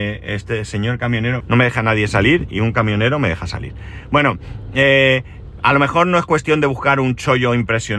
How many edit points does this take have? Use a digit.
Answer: 1